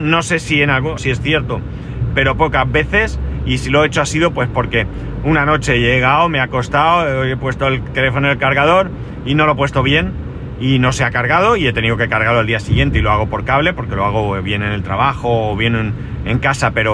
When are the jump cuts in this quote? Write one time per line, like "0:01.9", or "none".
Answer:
0:01.0